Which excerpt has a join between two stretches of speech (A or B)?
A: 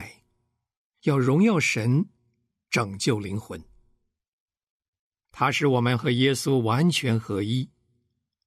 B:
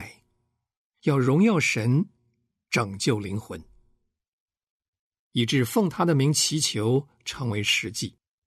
B